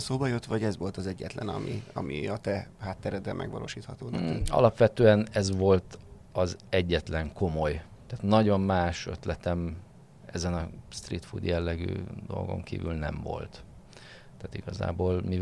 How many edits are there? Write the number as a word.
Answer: zero